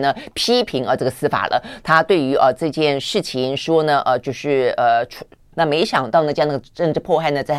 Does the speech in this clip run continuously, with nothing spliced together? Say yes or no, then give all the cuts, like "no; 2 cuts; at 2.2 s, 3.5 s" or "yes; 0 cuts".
no; 1 cut; at 5.5 s